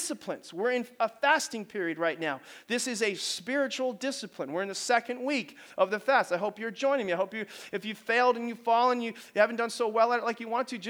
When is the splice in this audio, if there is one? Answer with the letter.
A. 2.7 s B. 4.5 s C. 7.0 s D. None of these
D